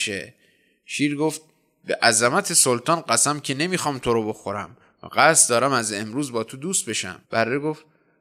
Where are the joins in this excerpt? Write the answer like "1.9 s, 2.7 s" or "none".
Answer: 7.2 s